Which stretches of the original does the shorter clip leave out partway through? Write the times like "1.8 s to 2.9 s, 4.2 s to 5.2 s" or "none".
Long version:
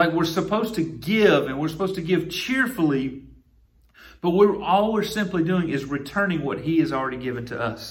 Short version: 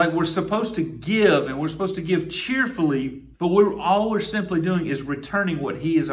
3.3 s to 4.2 s